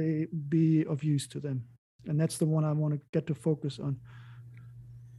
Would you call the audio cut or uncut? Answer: uncut